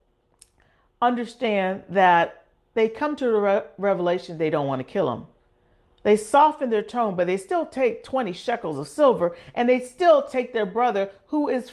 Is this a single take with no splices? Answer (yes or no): yes